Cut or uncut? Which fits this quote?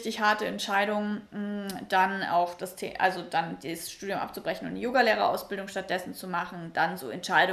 uncut